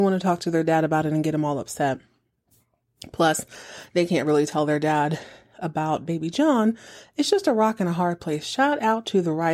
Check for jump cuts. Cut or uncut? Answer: uncut